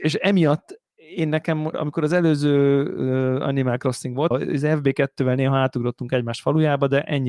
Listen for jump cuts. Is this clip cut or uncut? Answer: cut